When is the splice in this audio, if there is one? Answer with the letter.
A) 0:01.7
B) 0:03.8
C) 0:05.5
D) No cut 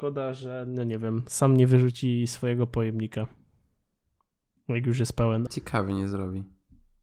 C